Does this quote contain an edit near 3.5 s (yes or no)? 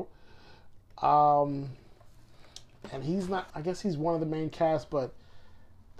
yes